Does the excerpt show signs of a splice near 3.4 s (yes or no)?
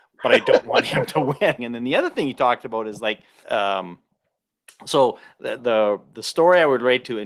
yes